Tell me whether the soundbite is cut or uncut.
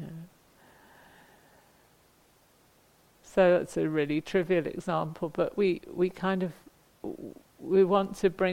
uncut